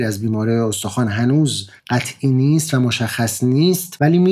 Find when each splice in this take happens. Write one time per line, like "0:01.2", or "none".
0:01.8

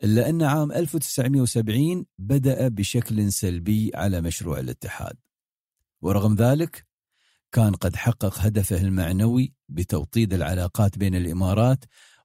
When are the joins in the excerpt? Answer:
none

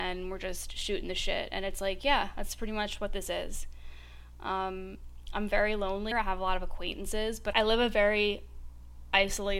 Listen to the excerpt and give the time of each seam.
0:06.1
0:07.5

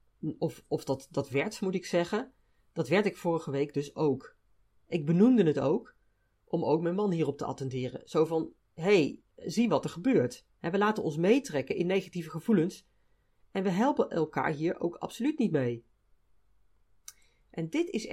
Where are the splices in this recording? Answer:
none

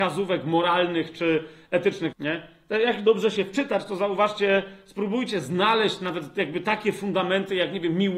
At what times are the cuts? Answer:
0:02.1

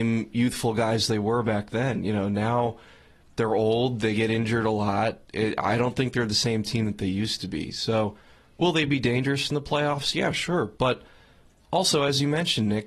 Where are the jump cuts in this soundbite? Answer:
none

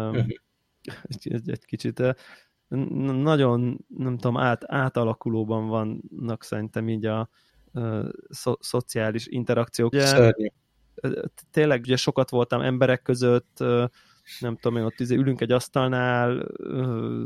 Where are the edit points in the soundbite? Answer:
0:09.9
0:11.8

